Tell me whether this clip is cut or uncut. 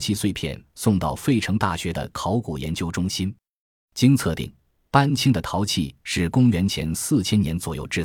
uncut